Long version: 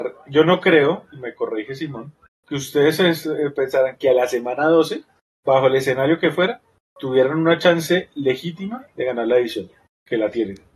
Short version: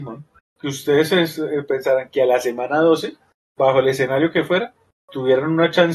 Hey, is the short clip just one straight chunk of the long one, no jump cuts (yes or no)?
yes